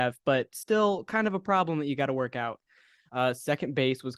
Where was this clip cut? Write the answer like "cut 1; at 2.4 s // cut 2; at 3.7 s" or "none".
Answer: cut 1; at 3.1 s